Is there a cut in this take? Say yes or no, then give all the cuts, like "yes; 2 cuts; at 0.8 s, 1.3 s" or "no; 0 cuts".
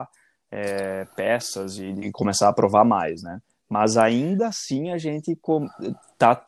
no; 0 cuts